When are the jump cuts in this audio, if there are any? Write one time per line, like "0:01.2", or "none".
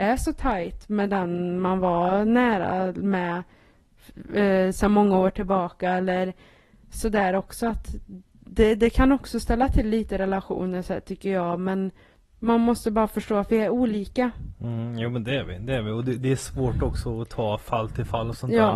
none